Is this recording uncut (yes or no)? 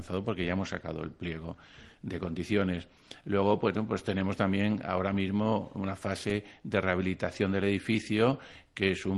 yes